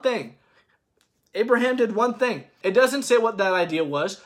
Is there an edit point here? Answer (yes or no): yes